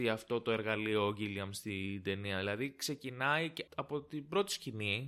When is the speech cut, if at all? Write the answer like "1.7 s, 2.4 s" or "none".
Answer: 3.7 s